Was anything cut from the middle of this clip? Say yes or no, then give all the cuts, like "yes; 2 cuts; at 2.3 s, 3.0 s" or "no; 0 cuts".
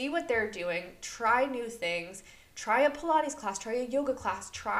no; 0 cuts